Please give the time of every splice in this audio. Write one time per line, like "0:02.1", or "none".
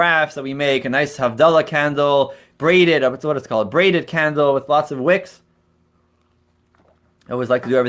none